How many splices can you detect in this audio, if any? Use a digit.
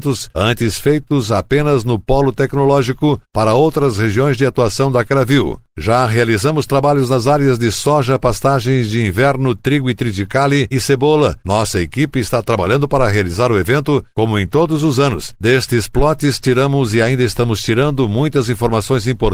2